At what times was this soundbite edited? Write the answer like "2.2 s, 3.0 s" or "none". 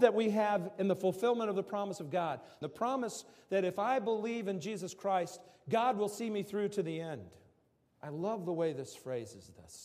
2.6 s, 7.9 s